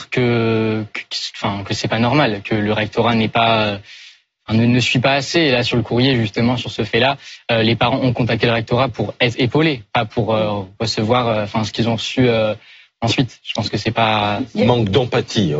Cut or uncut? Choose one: uncut